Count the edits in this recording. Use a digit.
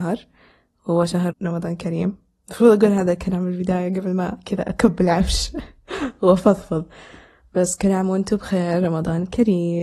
1